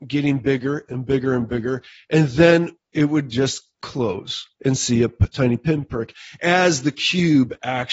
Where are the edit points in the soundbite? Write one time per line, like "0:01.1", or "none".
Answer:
none